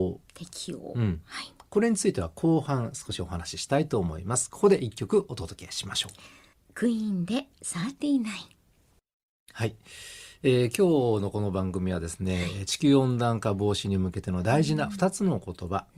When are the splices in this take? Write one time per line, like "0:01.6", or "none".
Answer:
none